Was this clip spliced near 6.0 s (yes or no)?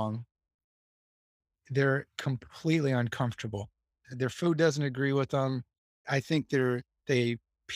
yes